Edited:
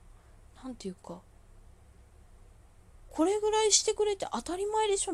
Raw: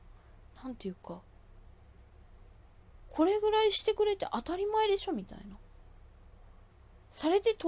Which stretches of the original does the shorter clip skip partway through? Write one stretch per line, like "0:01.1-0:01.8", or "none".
none